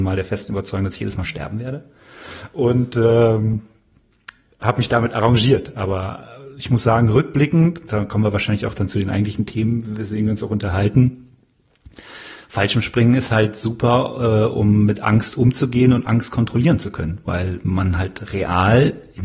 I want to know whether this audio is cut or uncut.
uncut